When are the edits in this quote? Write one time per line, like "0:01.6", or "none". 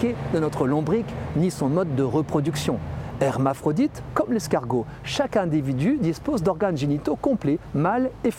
none